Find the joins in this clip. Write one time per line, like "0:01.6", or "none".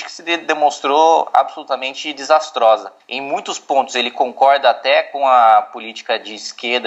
0:03.0